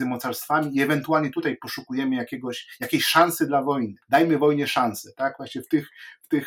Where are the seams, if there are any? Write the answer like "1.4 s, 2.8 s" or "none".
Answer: 4.0 s